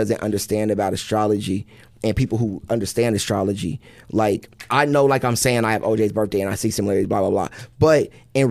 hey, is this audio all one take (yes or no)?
yes